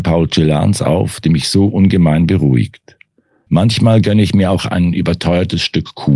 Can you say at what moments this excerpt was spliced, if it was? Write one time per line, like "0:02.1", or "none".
0:03.5
0:04.6